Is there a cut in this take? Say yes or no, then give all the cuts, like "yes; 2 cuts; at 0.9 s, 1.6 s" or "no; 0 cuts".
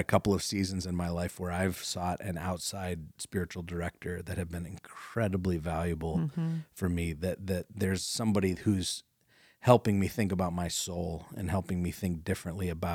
no; 0 cuts